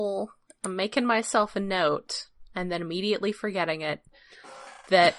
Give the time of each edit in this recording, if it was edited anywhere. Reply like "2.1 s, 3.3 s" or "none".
none